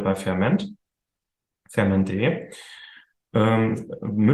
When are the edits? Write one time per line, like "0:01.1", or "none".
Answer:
none